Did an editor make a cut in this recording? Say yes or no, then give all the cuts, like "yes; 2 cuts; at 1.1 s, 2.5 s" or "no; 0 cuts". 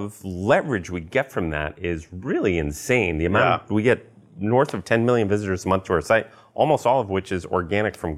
no; 0 cuts